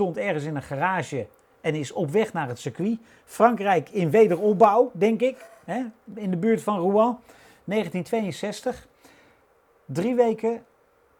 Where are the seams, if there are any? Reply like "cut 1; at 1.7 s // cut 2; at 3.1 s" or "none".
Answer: none